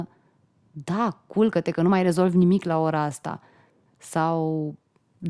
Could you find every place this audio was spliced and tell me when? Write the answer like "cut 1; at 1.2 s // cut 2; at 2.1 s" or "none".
cut 1; at 3.9 s